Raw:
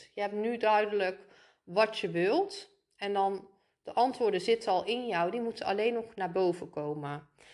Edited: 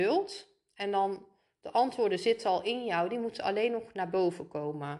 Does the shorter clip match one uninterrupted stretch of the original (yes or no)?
yes